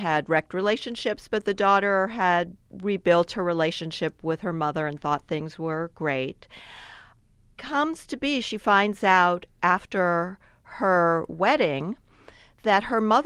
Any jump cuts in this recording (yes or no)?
no